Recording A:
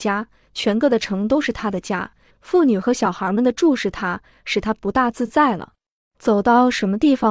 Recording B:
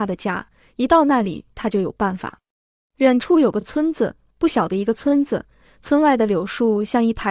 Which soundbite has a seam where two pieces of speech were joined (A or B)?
A